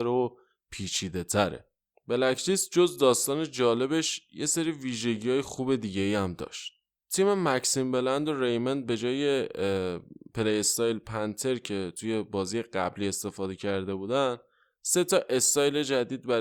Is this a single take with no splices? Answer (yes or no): yes